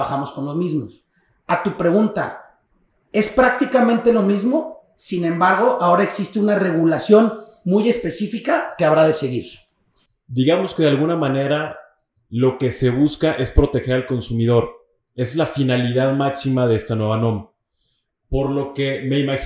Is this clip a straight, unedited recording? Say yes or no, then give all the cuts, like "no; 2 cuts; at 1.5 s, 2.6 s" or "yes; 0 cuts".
yes; 0 cuts